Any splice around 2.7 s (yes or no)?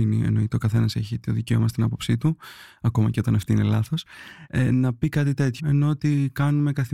no